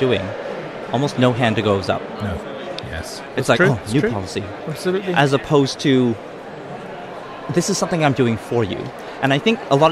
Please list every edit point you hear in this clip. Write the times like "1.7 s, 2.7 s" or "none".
2.8 s

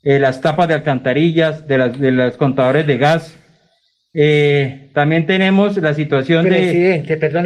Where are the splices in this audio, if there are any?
none

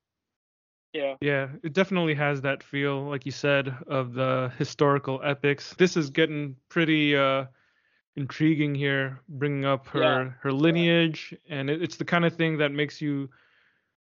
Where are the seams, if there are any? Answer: 5.8 s

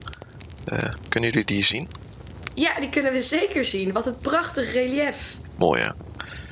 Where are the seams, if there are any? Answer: 2.5 s

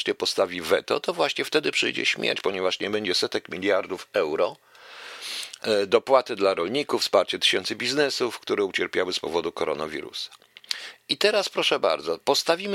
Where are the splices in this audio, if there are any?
none

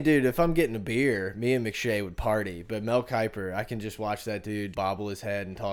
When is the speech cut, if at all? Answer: 4.7 s

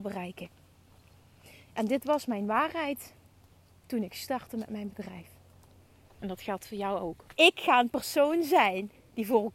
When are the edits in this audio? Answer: 6.2 s, 7.3 s

